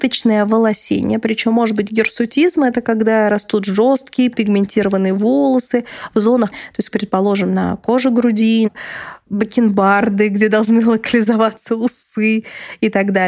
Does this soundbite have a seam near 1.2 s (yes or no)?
no